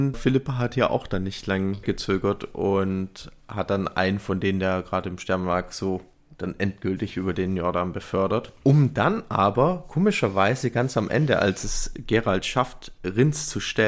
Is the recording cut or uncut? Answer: uncut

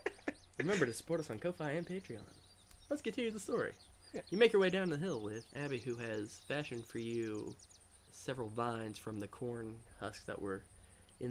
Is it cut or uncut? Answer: cut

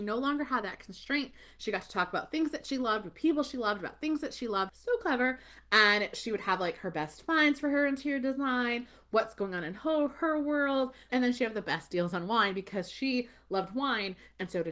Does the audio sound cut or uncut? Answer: cut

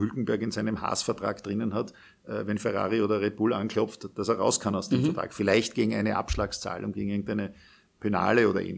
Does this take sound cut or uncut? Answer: uncut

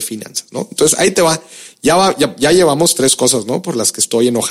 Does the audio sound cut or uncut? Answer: uncut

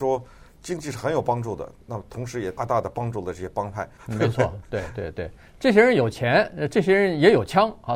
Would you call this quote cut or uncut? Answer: cut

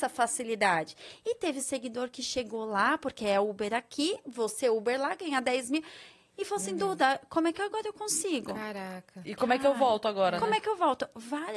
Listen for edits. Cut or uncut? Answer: uncut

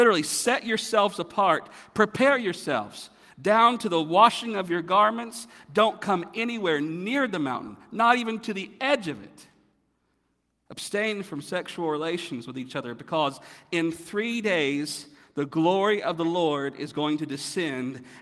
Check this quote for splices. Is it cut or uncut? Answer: uncut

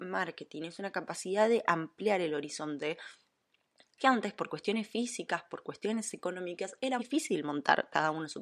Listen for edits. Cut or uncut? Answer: cut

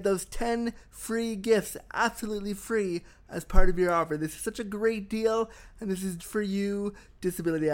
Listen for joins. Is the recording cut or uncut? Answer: cut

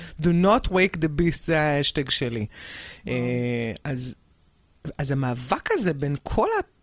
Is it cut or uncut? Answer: uncut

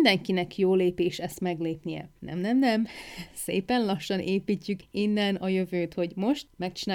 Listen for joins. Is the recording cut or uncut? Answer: cut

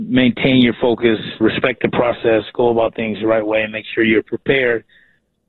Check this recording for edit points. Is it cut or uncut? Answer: cut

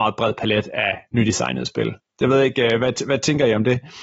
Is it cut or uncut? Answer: uncut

